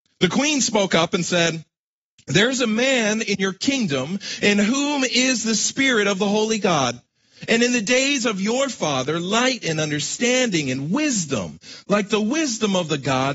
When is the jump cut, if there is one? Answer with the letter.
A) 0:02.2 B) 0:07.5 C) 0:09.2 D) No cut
D